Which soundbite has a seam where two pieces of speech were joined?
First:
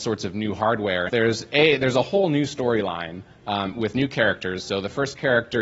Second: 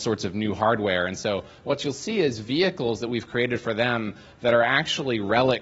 first; 1 cut; at 1.1 s

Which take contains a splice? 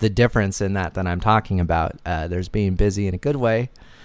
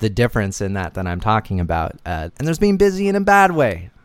second; 1 cut; at 2.3 s

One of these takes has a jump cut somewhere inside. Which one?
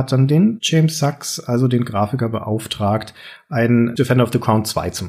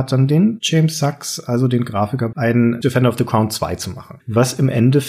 second; 2 cuts; at 2.3 s, 4.2 s

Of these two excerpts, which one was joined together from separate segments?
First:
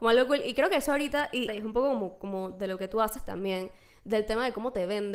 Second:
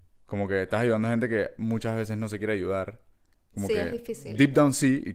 first; 1 cut; at 1.5 s

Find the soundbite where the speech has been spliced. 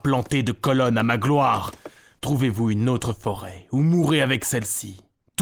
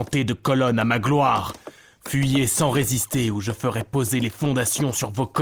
first; 1 cut; at 2.2 s

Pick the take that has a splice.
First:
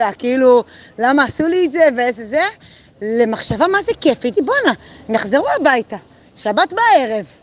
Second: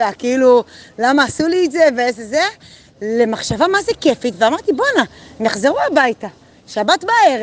first; 1 cut; at 4.3 s

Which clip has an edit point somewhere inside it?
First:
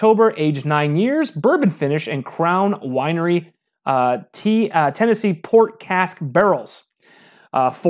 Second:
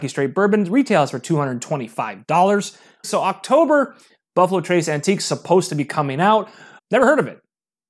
second; 2 cuts; at 3.0 s, 6.8 s

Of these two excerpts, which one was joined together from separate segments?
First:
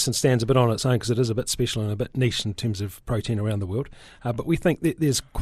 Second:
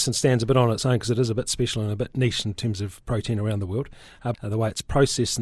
second; 1 cut; at 4.3 s

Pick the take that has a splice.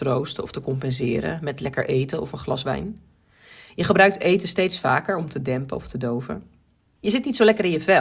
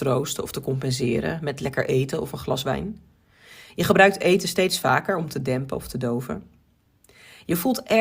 first; 1 cut; at 7.0 s

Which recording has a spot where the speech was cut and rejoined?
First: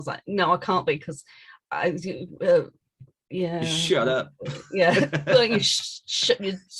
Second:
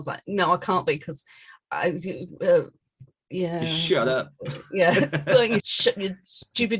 second; 1 cut; at 5.6 s

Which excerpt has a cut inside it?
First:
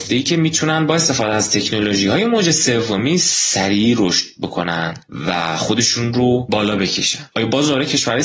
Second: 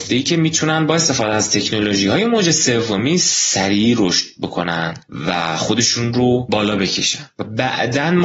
first; 1 cut; at 7.3 s

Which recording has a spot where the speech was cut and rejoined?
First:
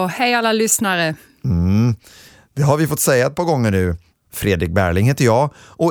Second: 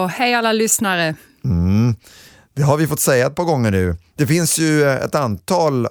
first; 1 cut; at 4.1 s

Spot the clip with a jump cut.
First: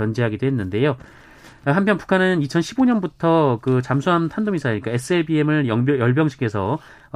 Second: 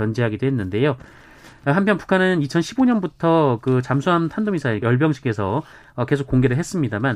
second; 1 cut; at 4.8 s

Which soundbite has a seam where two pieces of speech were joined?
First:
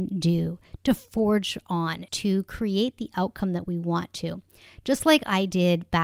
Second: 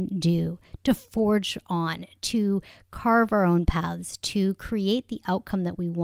first; 1 cut; at 2.1 s

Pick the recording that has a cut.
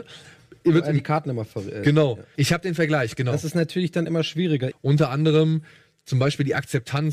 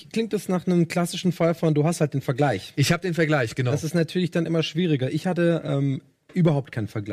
first; 2 cuts; at 2.4 s, 4.7 s

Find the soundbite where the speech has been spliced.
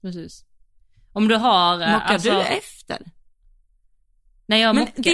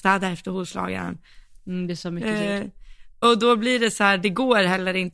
second; 1 cut; at 1.6 s

